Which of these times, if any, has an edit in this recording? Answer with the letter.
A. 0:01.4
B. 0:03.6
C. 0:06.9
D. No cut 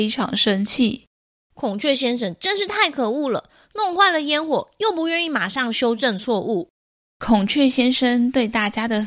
D